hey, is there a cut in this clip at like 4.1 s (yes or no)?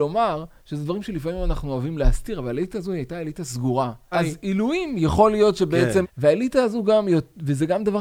yes